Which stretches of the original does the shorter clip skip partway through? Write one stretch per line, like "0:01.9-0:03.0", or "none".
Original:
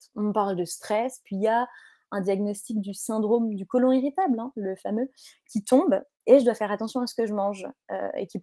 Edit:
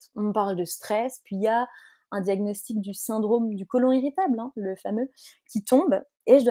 none